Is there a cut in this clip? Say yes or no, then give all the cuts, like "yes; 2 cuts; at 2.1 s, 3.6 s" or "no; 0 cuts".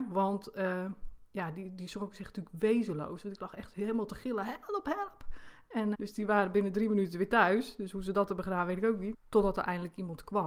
yes; 2 cuts; at 5.9 s, 9.1 s